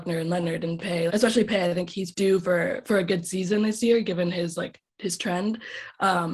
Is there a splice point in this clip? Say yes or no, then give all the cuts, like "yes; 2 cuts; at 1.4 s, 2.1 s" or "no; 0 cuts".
yes; 2 cuts; at 1.1 s, 2.1 s